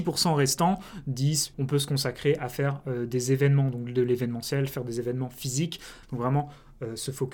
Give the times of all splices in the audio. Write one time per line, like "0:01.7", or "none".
0:01.5
0:06.0